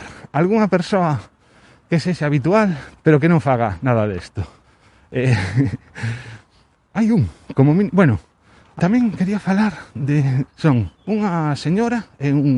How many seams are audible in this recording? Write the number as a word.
two